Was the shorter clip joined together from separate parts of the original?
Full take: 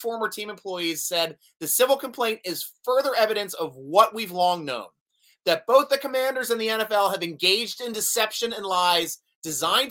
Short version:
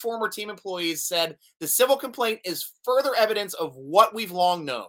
no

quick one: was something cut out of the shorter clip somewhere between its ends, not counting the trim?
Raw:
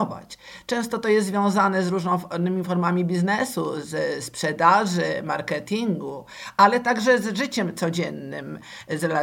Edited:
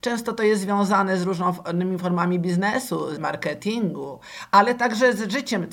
yes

